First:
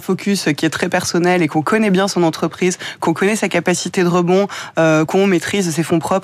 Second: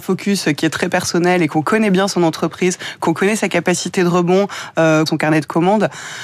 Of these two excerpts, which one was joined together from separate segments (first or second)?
second